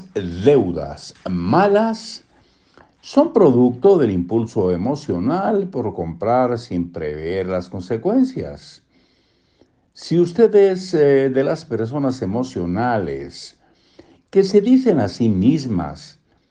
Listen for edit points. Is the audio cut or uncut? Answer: uncut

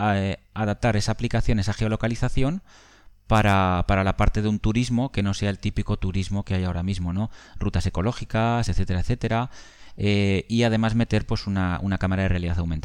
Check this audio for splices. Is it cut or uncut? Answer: uncut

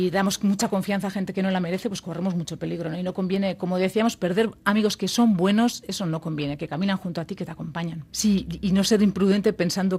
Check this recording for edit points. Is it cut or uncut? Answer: cut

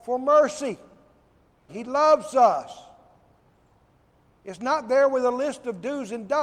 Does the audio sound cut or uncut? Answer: cut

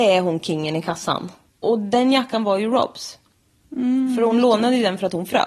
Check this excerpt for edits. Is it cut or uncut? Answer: cut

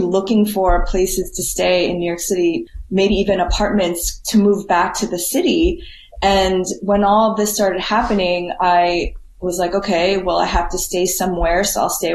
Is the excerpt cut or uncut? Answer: uncut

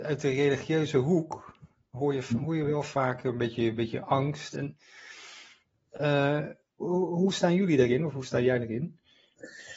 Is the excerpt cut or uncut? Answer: cut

